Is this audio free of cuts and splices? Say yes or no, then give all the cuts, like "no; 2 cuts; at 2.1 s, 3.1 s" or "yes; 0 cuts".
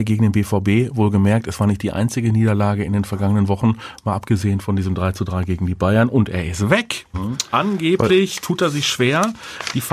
no; 1 cut; at 7.1 s